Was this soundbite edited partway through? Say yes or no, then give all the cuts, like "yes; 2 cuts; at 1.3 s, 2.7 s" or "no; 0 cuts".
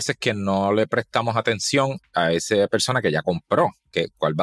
no; 0 cuts